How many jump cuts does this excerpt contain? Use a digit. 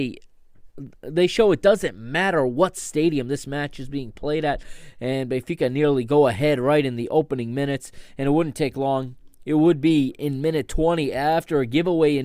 0